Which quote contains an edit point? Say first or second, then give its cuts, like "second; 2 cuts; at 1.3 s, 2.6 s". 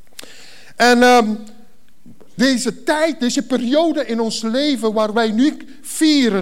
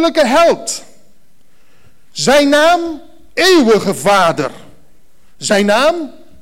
first; 1 cut; at 2.4 s